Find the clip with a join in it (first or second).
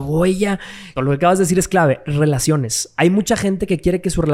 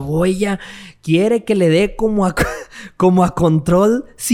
first